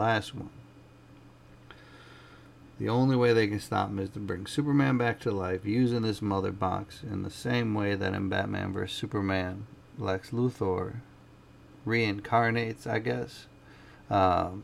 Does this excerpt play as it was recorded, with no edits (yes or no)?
yes